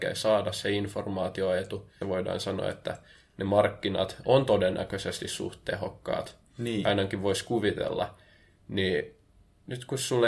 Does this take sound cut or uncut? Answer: cut